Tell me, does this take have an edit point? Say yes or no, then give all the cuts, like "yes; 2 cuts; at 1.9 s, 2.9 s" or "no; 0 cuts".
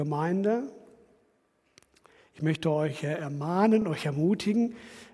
no; 0 cuts